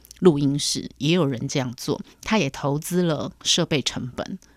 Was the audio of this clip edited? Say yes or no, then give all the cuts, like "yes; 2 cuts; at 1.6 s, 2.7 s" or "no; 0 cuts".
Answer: no; 0 cuts